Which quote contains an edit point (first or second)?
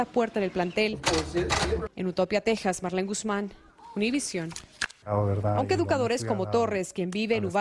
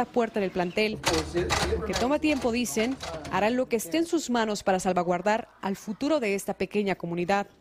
first